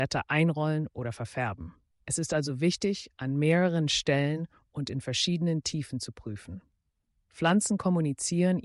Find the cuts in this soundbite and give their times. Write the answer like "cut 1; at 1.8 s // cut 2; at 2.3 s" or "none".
cut 1; at 1.9 s